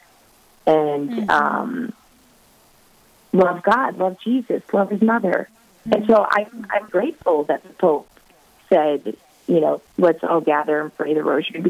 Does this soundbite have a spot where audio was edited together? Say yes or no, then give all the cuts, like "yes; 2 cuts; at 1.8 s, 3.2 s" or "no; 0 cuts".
yes; 3 cuts; at 5.9 s, 6.9 s, 9.9 s